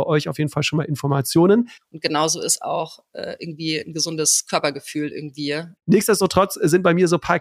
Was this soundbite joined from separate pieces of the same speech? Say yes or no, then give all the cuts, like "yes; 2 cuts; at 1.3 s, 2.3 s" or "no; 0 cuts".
yes; 2 cuts; at 1.8 s, 5.8 s